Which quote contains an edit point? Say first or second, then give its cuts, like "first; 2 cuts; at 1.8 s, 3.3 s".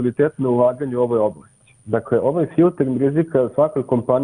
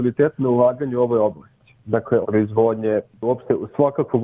second; 1 cut; at 2.2 s